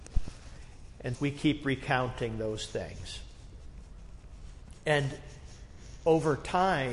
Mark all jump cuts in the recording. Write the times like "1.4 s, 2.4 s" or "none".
1.1 s